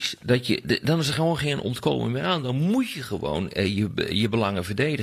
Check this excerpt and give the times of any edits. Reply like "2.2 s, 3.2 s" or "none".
none